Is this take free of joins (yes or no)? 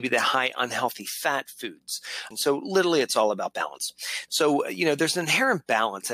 no